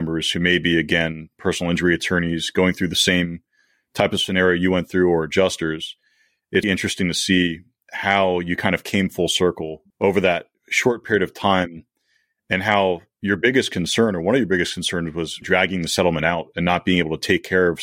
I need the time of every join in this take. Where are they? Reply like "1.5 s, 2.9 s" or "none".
6.6 s, 9.9 s, 15.4 s